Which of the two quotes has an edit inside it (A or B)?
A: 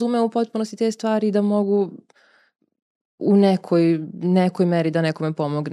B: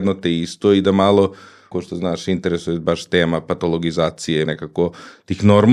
B